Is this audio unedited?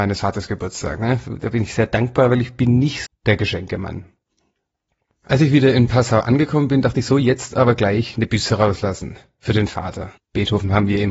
no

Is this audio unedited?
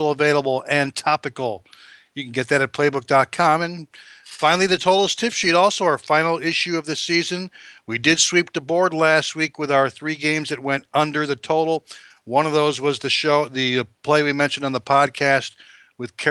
yes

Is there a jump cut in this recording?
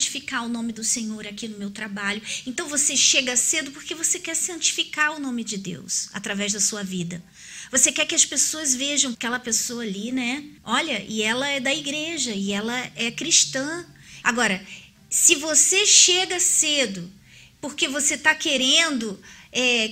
yes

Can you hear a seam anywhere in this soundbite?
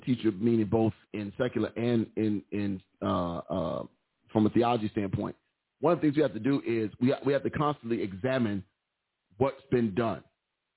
no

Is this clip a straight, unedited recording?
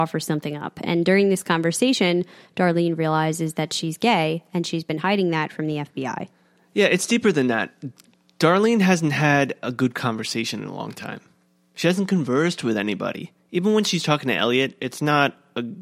yes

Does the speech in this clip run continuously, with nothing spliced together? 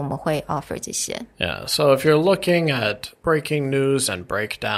yes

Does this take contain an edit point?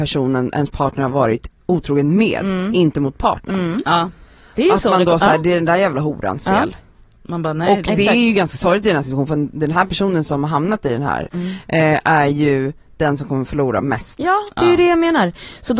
yes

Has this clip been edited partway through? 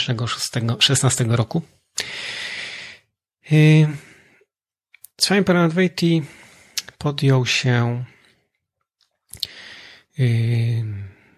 no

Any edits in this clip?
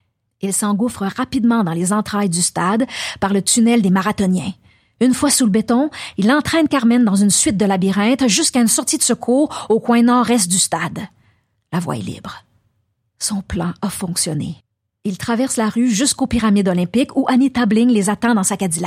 yes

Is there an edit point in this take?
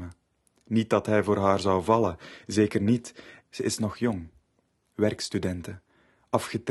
yes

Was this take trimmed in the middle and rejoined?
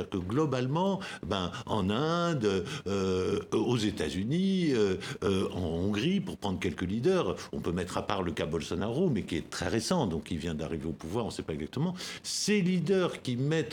no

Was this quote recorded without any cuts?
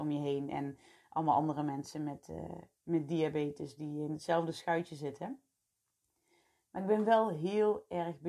yes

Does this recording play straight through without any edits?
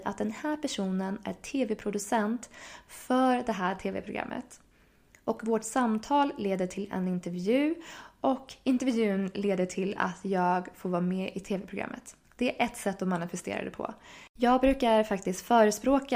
no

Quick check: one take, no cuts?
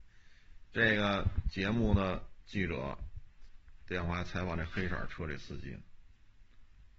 yes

